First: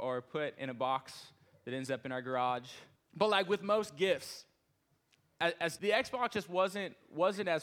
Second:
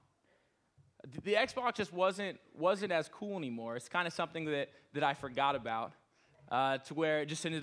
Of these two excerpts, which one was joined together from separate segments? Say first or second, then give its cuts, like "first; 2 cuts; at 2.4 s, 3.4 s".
first; 2 cuts; at 3.0 s, 5.8 s